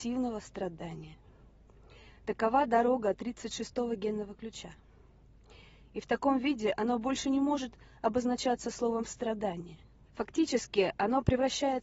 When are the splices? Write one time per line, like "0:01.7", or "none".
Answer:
0:05.8
0:10.1